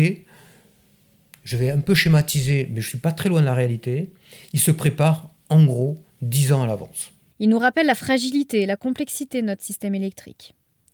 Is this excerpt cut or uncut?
cut